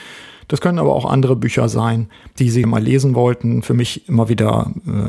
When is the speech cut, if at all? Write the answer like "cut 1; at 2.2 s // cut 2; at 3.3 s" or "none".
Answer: cut 1; at 2.6 s